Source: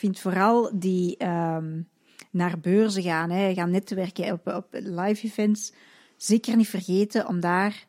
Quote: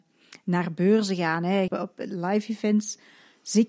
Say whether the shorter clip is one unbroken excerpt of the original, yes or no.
no